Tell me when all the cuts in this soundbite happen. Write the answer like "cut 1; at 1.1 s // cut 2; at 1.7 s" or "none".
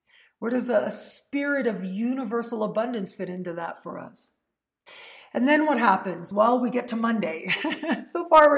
none